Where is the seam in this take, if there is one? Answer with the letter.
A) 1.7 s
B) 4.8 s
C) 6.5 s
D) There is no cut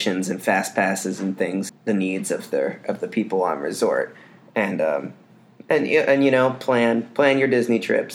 A